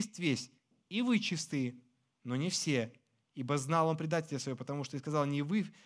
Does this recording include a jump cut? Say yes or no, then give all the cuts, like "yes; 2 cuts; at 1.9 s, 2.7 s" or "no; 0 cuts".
no; 0 cuts